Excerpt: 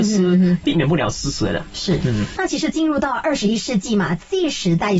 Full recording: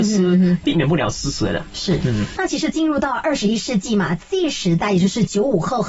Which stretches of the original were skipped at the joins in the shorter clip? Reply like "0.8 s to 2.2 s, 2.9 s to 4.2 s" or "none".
none